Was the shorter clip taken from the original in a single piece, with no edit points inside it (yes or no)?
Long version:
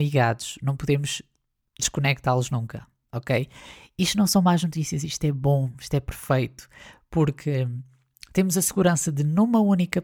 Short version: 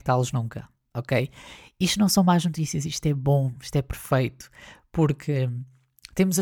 yes